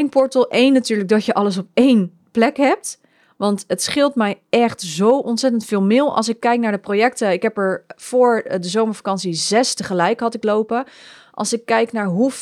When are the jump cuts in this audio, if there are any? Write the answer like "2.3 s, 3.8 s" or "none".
none